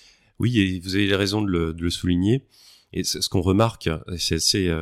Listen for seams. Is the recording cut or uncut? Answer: uncut